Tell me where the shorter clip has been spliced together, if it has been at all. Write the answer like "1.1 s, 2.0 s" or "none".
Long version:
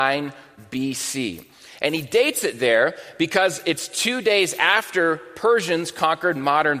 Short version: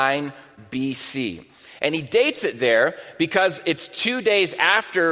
none